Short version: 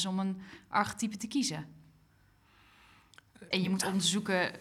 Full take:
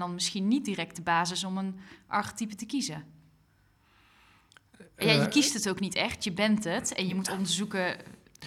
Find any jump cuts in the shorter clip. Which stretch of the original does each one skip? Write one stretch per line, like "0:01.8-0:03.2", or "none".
0:04.9-0:07.0